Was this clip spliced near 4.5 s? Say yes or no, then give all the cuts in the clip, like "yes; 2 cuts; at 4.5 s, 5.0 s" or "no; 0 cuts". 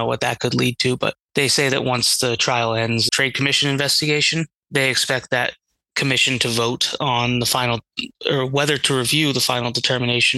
no; 1 cut; at 3.1 s